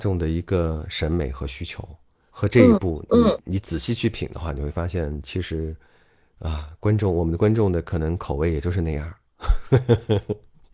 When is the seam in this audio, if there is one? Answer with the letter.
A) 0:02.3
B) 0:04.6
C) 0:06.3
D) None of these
A